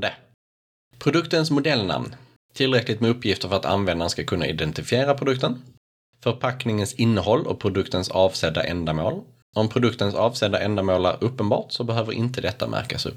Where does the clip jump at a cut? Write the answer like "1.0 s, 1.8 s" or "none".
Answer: none